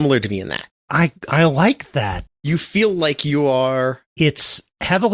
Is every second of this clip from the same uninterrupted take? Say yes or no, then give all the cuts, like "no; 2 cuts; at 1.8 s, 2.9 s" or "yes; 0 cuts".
no; 2 cuts; at 2.3 s, 4.1 s